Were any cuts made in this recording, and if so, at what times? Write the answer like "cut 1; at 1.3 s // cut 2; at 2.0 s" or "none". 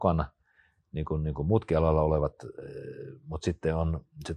none